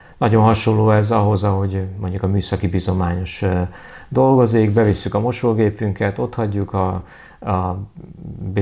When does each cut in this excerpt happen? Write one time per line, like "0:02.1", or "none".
none

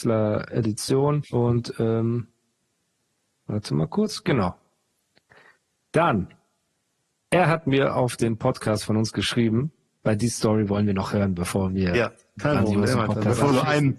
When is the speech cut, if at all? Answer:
0:01.2

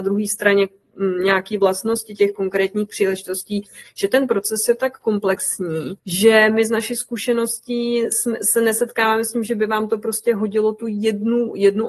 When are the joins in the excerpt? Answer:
0:06.0

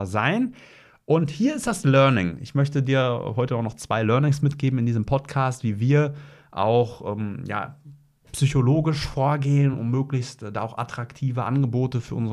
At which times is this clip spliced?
none

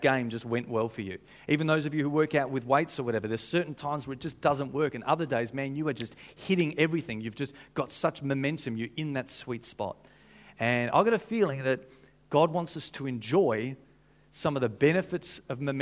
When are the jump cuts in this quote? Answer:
none

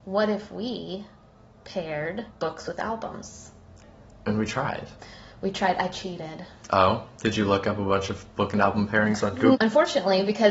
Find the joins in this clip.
0:02.3
0:09.5

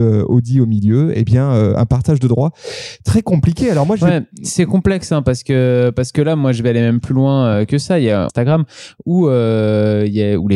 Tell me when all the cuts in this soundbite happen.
0:08.3

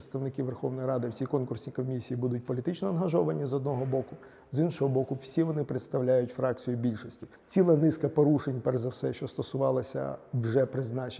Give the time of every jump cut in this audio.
none

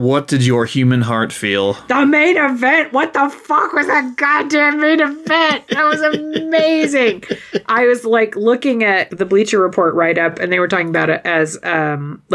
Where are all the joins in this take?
none

